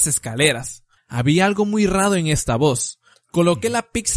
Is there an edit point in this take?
yes; 2 cuts; at 1.0 s, 3.1 s

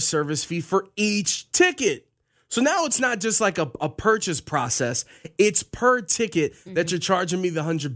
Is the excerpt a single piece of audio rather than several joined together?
yes; 0 cuts

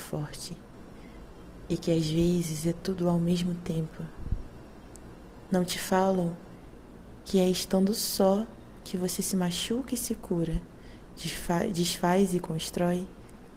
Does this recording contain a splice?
no; 0 cuts

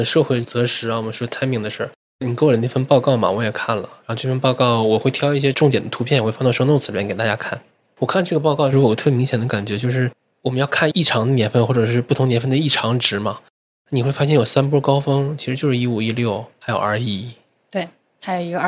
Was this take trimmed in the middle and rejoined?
no; 0 cuts

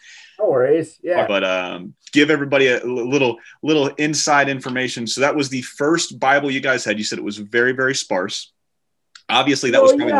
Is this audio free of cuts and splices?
no; 1 cut; at 1.3 s

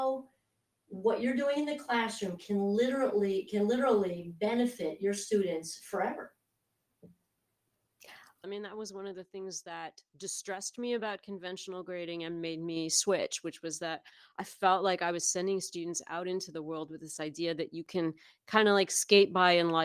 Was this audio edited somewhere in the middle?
yes; 1 cut; at 8.4 s

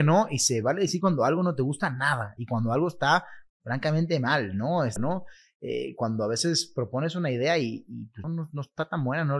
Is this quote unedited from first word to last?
no; 2 cuts; at 5.0 s, 8.2 s

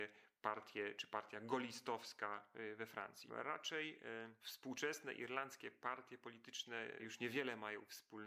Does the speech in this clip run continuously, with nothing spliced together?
yes; 0 cuts

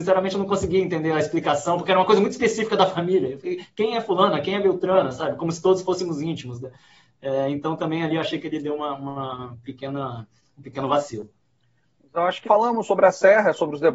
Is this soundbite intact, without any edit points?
no; 1 cut; at 12.4 s

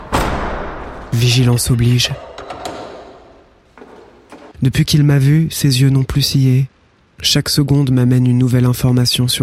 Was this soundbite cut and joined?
yes; 2 cuts; at 4.5 s, 7.0 s

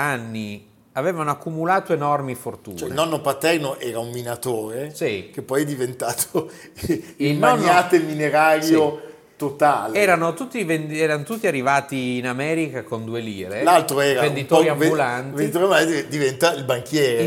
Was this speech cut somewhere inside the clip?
no; 0 cuts

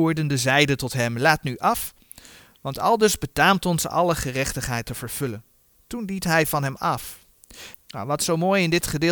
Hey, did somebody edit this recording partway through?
yes; 1 cut; at 7.7 s

